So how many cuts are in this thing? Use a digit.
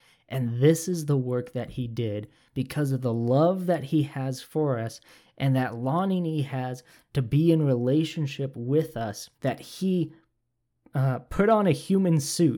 1